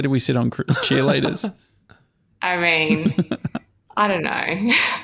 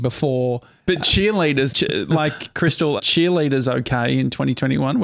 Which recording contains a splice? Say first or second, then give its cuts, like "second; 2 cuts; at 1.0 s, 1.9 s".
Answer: second; 2 cuts; at 1.7 s, 3.0 s